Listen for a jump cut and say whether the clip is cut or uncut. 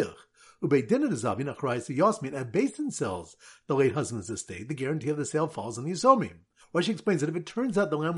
cut